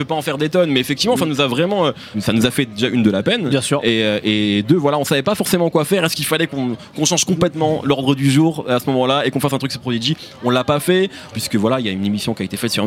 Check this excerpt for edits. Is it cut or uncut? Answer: cut